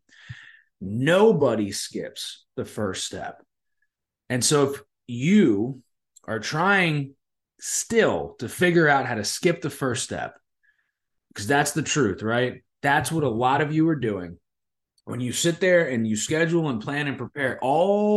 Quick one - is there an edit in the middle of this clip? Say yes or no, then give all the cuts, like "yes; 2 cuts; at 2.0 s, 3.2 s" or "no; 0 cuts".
no; 0 cuts